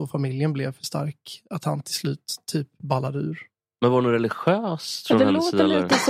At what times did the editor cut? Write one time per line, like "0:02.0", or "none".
none